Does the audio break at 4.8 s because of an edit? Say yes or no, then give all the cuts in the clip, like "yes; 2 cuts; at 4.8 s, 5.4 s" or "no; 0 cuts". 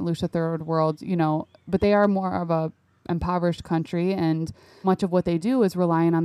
yes; 1 cut; at 4.8 s